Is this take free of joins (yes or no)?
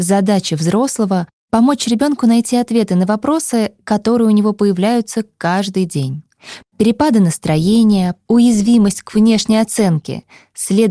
no